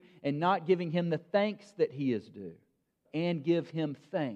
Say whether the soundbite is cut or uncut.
cut